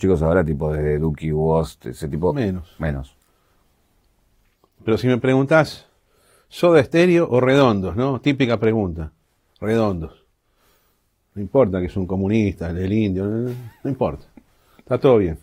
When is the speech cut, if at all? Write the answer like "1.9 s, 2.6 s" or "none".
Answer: none